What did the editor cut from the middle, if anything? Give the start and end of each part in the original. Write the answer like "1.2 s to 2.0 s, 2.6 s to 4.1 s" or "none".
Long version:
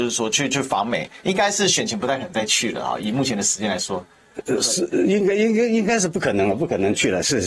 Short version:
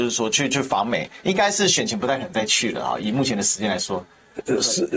none